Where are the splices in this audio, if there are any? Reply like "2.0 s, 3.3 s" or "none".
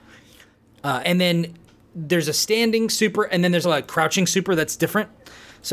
1.0 s, 3.6 s